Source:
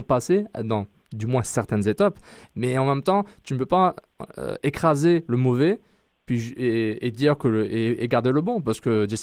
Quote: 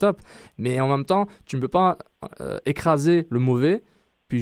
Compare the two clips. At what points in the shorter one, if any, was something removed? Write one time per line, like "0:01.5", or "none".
none

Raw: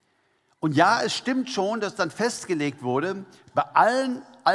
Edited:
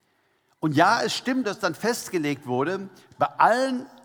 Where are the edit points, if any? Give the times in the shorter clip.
0:01.4

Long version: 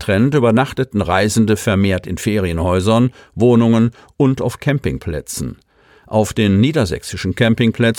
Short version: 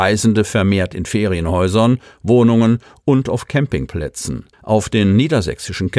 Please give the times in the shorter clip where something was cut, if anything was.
0:04.5

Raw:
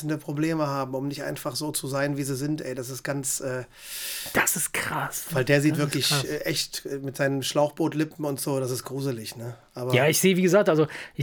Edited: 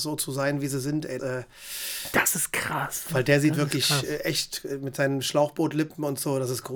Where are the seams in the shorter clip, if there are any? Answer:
0:01.2

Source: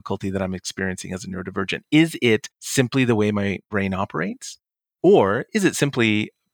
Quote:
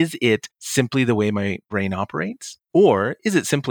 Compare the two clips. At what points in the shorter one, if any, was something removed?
0:02.6

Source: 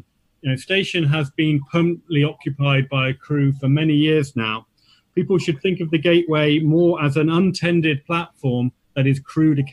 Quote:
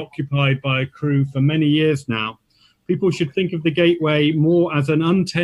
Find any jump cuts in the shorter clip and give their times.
none

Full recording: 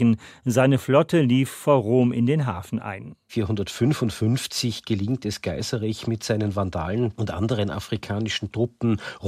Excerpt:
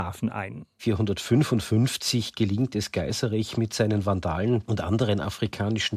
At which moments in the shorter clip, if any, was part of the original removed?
none

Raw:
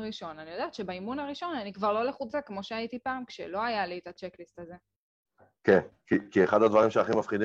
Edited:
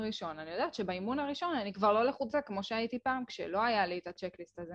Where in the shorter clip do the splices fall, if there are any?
none

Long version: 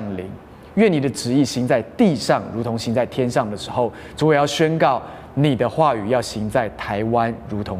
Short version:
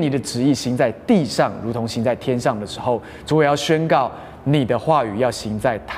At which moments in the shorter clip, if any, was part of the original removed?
none

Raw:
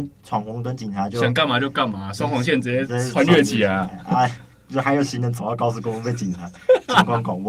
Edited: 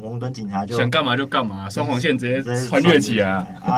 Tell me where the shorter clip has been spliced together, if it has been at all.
none

